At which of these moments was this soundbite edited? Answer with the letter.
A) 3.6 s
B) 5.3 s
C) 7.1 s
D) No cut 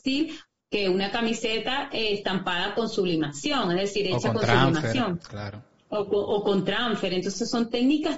D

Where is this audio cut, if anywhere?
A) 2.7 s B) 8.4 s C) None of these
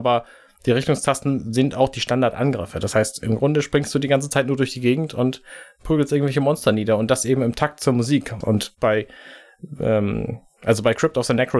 B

